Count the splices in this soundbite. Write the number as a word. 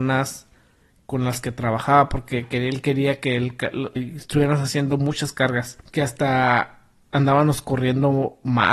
two